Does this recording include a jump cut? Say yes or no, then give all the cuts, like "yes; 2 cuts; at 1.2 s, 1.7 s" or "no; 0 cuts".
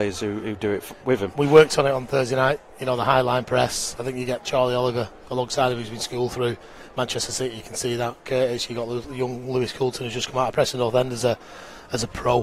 no; 0 cuts